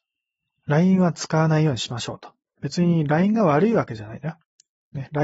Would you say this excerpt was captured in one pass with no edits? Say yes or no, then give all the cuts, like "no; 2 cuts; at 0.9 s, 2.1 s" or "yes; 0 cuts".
yes; 0 cuts